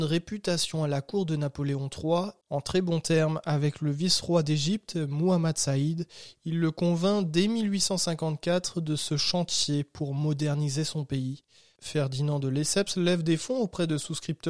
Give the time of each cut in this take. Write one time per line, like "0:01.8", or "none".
0:02.4